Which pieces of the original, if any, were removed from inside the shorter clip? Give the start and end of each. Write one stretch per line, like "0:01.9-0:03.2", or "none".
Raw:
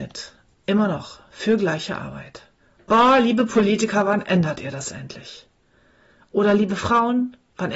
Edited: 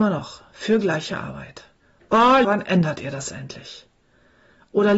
0:03.2-0:04.0